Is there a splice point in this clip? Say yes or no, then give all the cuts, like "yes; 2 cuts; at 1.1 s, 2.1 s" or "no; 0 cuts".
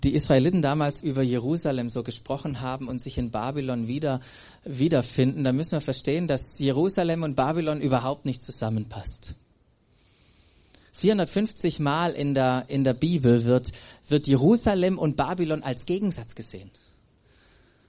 yes; 1 cut; at 1.0 s